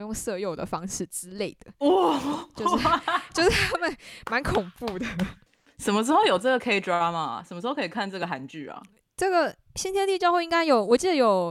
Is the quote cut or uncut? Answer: uncut